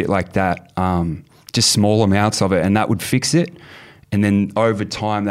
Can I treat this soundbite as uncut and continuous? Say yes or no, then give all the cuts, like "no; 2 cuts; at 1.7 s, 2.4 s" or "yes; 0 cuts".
yes; 0 cuts